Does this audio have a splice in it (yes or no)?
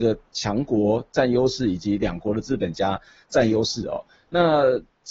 no